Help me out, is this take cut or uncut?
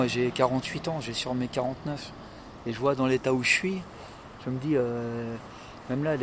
uncut